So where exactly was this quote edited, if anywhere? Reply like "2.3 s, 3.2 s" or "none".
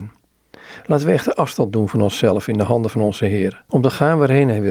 3.7 s